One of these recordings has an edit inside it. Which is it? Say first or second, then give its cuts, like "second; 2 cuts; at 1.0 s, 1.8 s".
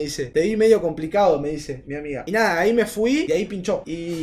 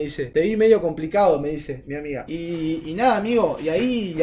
second; 1 cut; at 2.3 s